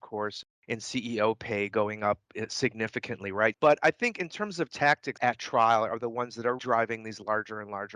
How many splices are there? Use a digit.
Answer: 3